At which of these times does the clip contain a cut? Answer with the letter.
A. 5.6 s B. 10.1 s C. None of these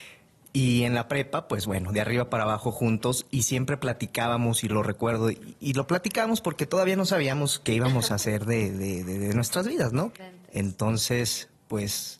B